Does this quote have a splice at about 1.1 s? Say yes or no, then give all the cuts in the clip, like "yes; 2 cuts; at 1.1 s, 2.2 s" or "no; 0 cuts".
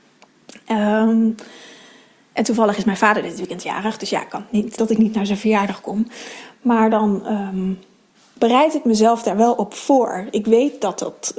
no; 1 cut; at 4.8 s